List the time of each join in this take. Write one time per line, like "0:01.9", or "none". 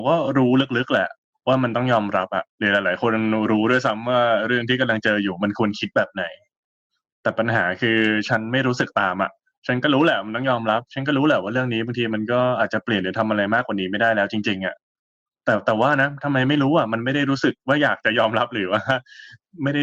0:02.5